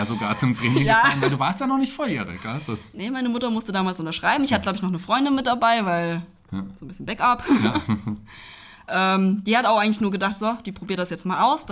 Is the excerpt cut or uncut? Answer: uncut